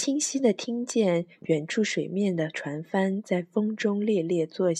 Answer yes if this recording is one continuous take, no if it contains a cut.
yes